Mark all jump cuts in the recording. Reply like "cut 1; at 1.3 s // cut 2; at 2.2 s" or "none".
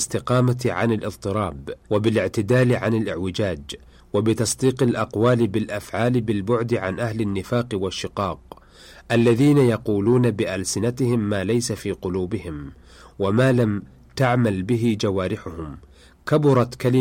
cut 1; at 1.8 s